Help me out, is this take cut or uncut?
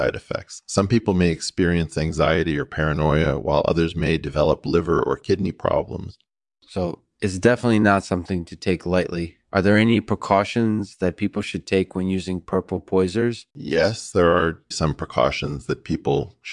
cut